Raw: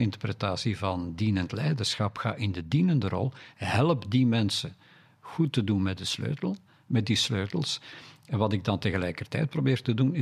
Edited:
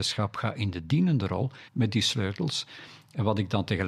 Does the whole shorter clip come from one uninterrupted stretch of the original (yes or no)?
no